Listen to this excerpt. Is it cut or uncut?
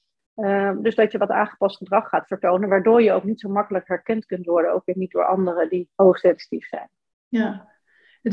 uncut